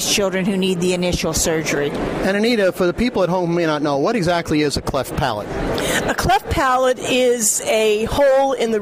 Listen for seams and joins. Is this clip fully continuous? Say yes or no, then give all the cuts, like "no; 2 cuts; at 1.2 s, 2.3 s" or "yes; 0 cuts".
yes; 0 cuts